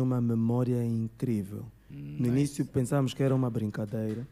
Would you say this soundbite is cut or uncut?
cut